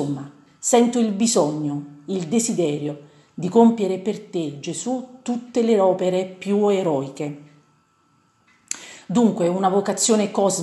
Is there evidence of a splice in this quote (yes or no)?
no